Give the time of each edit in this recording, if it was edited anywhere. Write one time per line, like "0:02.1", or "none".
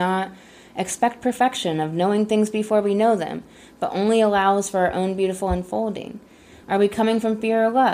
0:06.6